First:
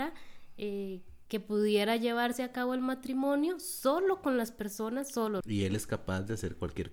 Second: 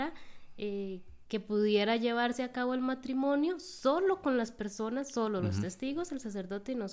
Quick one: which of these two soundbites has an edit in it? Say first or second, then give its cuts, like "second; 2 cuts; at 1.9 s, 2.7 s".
first; 1 cut; at 5.4 s